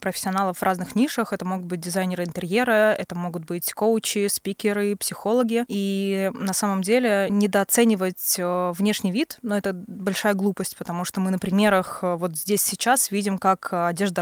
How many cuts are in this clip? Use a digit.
0